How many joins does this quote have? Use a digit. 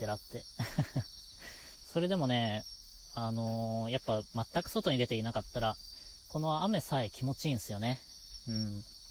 0